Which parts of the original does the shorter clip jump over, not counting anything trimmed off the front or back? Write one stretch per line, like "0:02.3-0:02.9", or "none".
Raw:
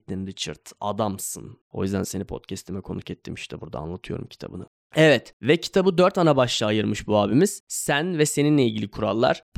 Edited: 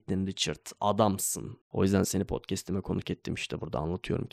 none